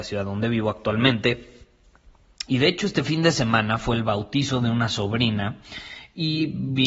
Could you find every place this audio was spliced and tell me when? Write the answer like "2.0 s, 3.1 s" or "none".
2.5 s